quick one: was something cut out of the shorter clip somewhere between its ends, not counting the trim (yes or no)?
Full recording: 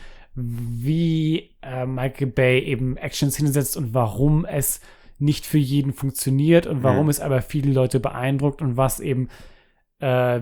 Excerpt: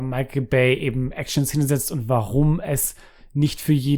no